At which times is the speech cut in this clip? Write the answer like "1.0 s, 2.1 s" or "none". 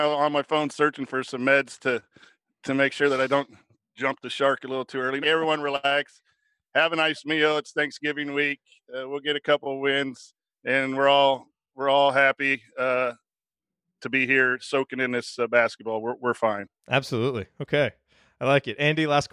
5.2 s, 16.8 s